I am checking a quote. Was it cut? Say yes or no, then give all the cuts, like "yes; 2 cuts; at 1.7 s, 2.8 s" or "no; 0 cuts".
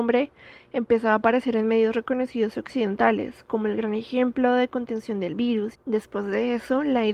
yes; 1 cut; at 5.7 s